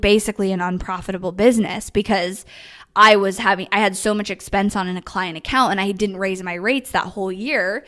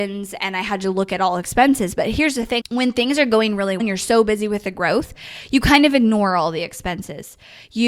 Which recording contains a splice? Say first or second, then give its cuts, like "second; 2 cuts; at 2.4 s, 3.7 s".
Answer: second; 2 cuts; at 2.6 s, 3.8 s